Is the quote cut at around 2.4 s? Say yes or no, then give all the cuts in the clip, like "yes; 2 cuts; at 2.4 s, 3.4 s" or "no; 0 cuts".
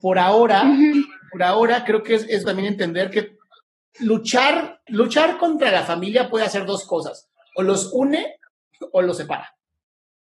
yes; 2 cuts; at 2.4 s, 4.9 s